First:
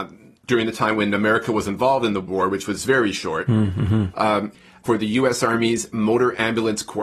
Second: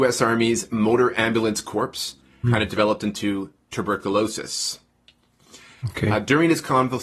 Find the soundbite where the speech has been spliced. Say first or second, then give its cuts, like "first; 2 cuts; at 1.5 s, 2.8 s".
second; 1 cut; at 2.4 s